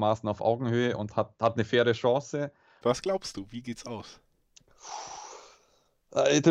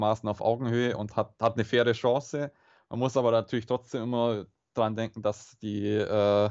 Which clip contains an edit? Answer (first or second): first